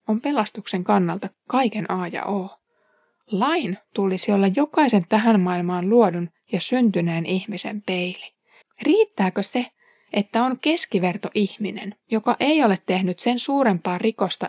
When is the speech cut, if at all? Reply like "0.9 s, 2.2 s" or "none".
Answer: 8.6 s